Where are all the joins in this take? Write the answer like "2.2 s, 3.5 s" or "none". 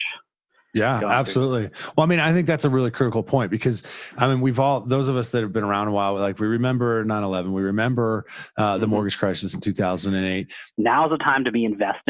10.7 s

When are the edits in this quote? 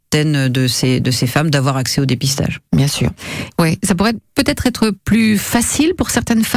3.5 s

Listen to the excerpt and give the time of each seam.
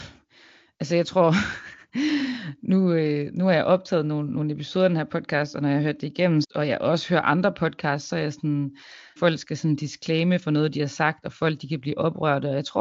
6.4 s, 9.2 s

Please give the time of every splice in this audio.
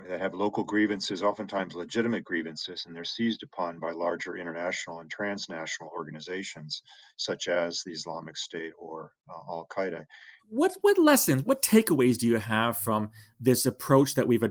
10.4 s, 11.5 s

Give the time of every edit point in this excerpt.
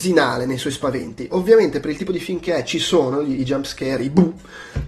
none

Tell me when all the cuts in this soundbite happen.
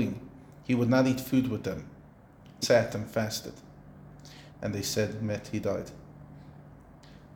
2.6 s, 4.5 s

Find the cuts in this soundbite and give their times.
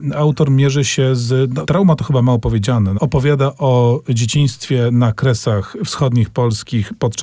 1.7 s, 3.0 s

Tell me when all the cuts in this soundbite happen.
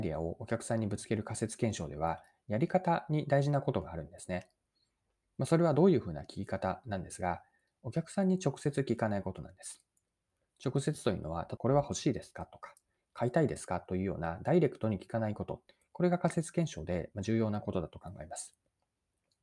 11.6 s

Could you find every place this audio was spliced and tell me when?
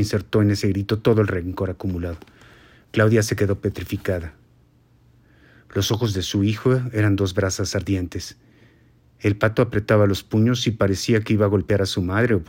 none

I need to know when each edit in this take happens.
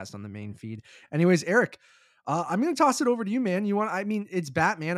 none

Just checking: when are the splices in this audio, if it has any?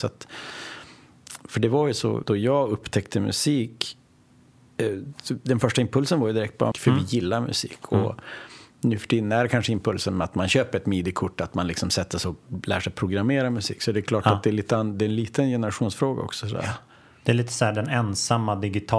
2.2 s, 6.7 s

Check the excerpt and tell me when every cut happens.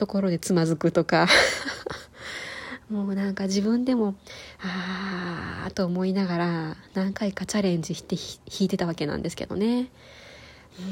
none

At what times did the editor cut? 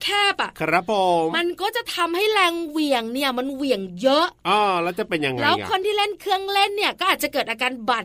1.3 s

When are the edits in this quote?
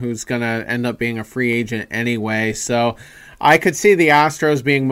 none

